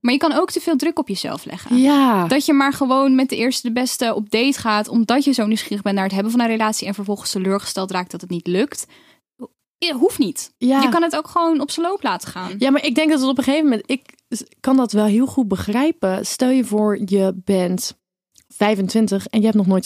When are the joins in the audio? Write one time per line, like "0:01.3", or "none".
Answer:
none